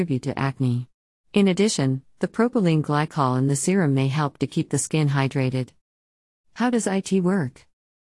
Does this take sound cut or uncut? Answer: cut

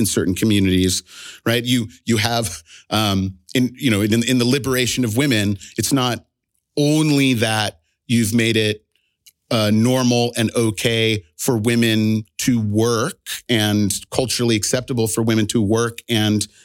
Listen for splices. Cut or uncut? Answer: uncut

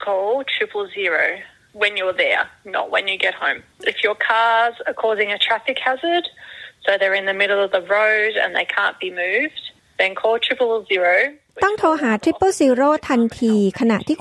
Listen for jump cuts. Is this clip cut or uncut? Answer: uncut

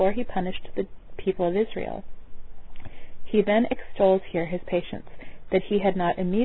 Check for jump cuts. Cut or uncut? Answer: uncut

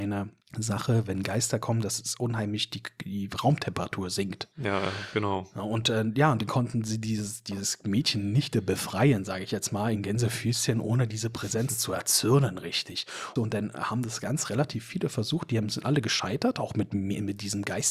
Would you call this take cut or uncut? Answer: uncut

